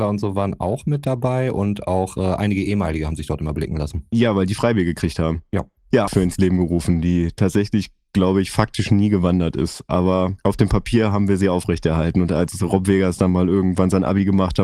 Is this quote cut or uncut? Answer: cut